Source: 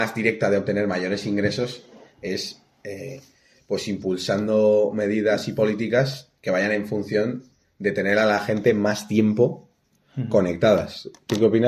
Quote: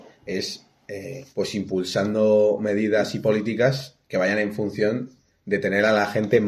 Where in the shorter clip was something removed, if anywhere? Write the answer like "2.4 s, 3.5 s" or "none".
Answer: 1.3 s

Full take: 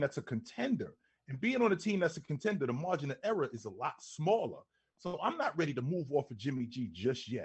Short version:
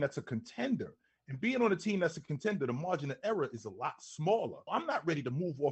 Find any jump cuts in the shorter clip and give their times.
4.7 s

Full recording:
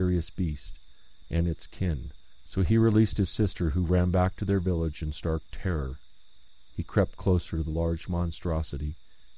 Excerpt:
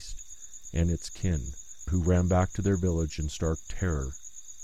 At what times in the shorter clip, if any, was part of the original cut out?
1.9 s

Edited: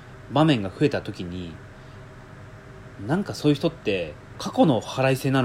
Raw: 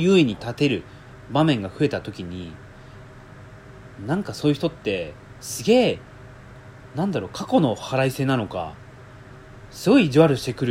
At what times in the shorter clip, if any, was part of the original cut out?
4.3 s

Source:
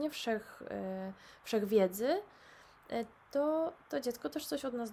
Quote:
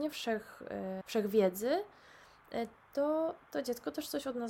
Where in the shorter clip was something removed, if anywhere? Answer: 1.0 s

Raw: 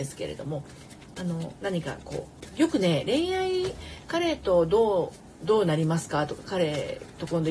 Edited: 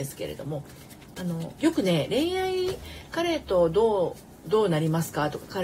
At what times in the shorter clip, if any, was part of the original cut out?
1.6 s

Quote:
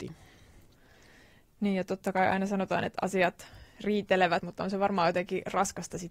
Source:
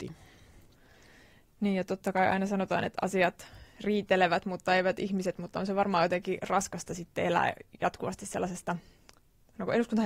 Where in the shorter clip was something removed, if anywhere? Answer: 4.4 s

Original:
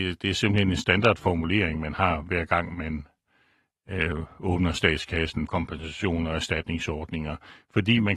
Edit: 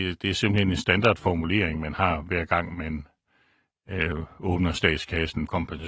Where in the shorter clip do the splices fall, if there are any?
none

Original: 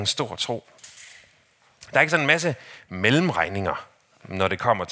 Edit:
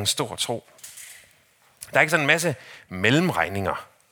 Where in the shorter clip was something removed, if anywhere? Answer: none

